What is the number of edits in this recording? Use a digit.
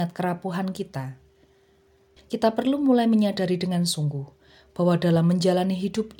1